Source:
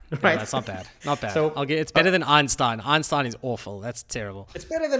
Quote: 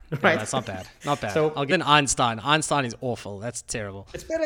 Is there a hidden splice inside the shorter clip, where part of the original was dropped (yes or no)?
yes